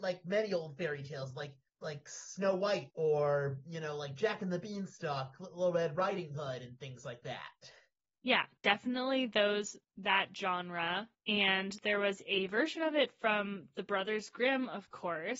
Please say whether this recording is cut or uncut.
cut